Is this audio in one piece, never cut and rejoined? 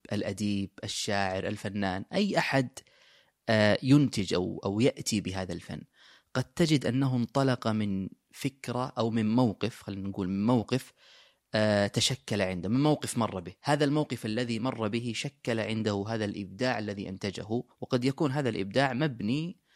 no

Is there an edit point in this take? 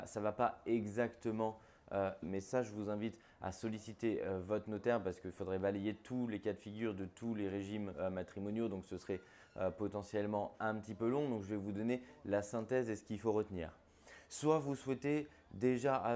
yes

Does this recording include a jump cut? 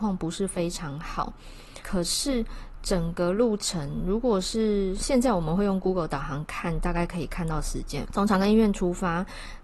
yes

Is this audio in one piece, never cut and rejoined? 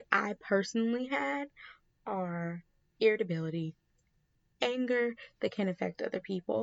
yes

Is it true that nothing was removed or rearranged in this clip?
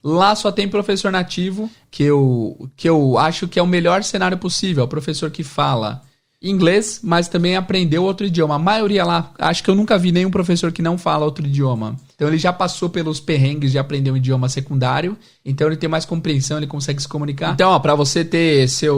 no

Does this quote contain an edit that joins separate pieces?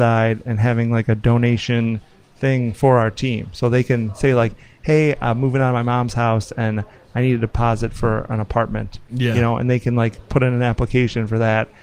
no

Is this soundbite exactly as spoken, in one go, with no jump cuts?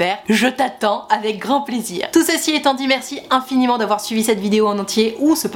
yes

